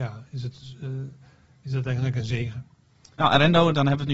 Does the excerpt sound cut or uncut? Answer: cut